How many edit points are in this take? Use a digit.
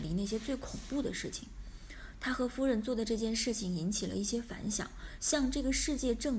1